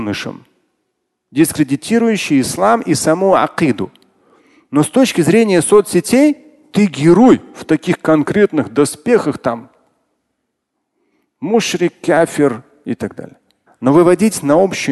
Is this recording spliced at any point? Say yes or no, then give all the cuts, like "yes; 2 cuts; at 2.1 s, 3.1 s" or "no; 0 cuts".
yes; 1 cut; at 13.7 s